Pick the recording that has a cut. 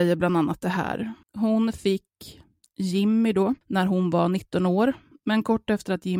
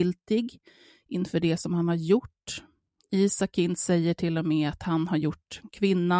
first; 3 cuts; at 1.2 s, 3.6 s, 5.1 s

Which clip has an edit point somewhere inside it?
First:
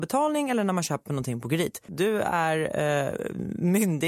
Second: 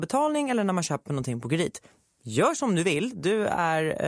first; 1 cut; at 1.9 s

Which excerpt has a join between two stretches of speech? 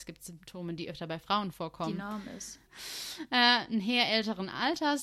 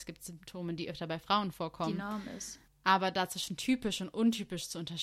first; 1 cut; at 2.6 s

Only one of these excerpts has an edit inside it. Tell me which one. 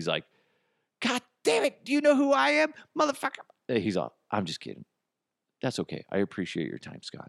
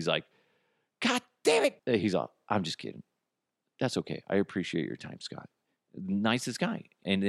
second; 1 cut; at 1.8 s

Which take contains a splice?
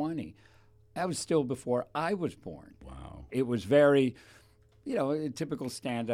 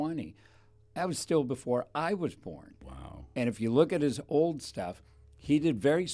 first; 1 cut; at 3.3 s

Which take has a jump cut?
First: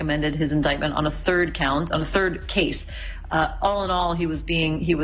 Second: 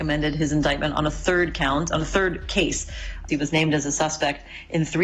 second; 1 cut; at 3.3 s

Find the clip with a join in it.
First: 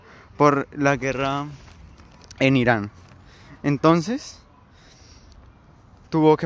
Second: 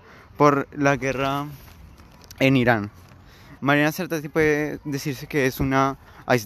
second; 1 cut; at 3.6 s

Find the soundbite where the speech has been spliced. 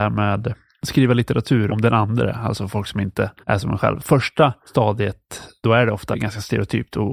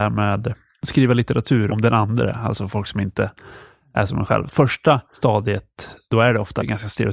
first; 1 cut; at 3.4 s

